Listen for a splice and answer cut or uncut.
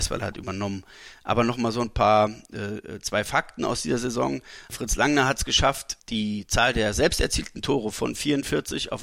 uncut